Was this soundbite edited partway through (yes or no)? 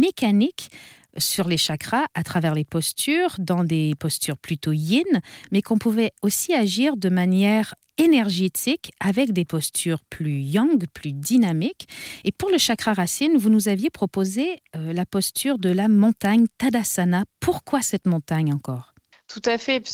no